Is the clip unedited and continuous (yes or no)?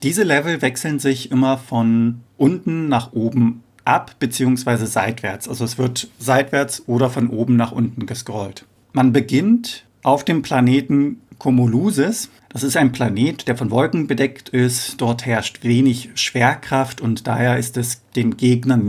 yes